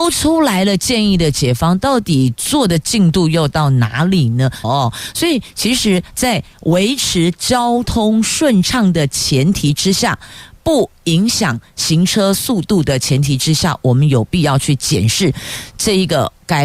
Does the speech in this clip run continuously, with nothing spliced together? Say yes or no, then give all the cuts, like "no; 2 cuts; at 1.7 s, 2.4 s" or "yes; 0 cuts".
no; 1 cut; at 4.6 s